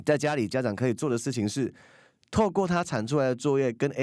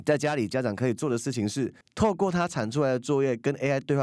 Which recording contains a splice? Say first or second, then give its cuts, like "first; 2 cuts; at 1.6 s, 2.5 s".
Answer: second; 1 cut; at 1.8 s